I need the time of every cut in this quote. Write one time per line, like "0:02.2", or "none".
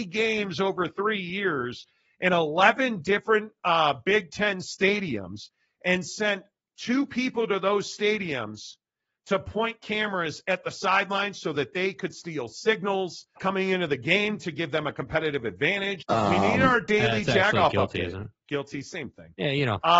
0:13.4
0:16.0